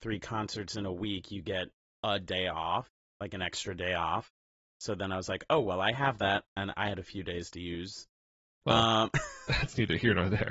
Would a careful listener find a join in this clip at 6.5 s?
yes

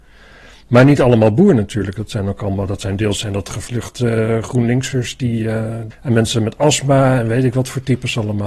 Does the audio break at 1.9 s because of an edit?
no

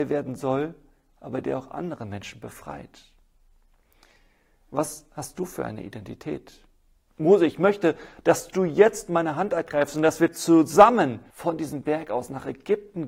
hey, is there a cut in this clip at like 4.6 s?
no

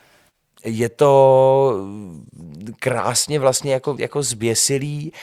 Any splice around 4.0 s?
yes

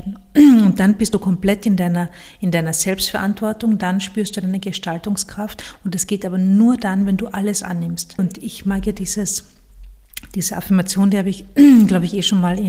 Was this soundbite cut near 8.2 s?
yes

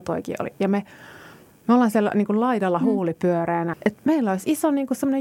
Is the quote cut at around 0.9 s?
no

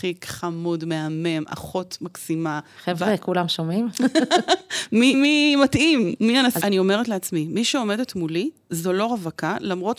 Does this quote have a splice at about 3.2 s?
no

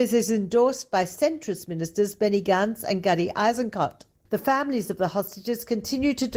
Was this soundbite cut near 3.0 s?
no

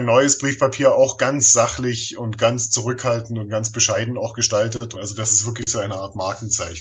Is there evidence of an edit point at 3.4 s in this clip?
no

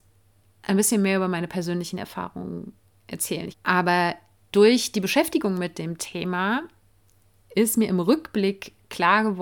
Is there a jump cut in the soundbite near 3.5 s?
yes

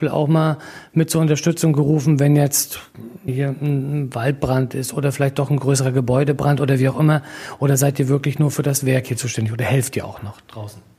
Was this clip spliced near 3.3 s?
yes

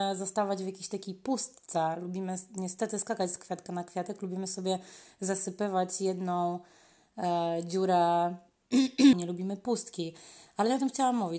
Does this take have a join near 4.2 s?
no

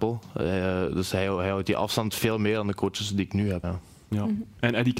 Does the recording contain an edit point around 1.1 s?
no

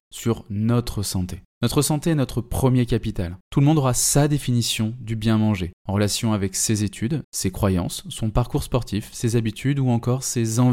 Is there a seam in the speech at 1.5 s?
no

